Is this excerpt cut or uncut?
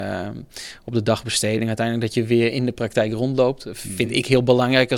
uncut